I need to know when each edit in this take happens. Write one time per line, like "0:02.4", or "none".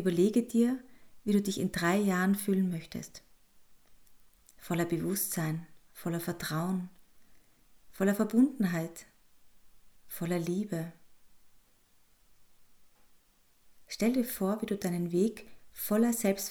none